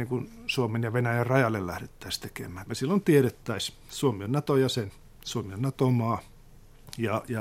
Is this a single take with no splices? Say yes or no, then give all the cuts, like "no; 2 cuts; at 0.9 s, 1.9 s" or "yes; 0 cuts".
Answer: no; 1 cut; at 2.7 s